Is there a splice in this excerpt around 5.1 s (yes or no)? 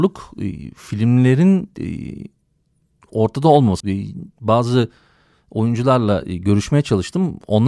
no